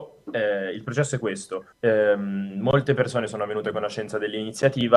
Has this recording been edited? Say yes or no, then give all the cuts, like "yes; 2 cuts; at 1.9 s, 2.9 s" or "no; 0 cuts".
yes; 1 cut; at 1.7 s